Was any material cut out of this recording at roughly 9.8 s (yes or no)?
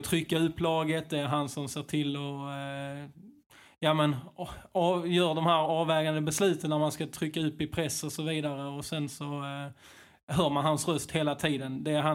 no